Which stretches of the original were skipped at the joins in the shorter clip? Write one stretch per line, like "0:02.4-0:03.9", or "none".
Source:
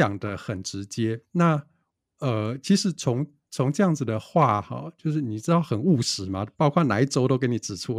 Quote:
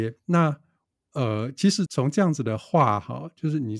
0:02.9-0:03.5